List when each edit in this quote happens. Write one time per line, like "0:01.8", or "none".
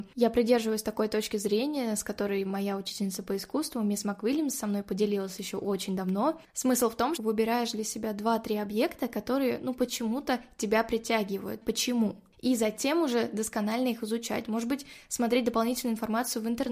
0:07.2
0:11.6